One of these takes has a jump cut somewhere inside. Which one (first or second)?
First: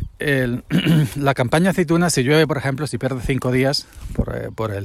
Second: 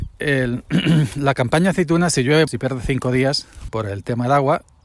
second